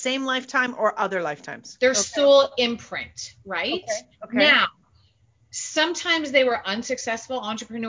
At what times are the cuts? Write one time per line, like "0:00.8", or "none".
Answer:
0:01.8

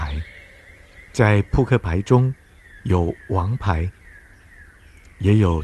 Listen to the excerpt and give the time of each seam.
0:01.1
0:02.8

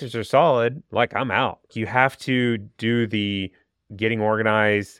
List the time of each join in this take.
0:01.7

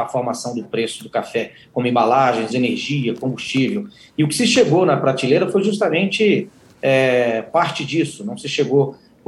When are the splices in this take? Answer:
0:02.5

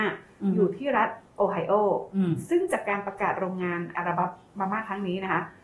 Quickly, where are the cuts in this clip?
0:03.9

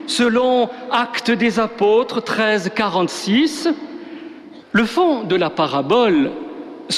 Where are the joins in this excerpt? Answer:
0:04.6

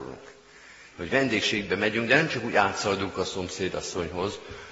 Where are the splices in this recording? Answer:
0:00.9

